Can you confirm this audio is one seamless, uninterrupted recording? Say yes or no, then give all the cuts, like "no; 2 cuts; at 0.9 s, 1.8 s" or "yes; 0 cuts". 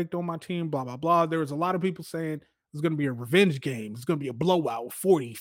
yes; 0 cuts